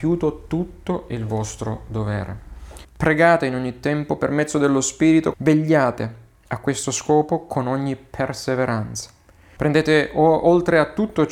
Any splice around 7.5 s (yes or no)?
no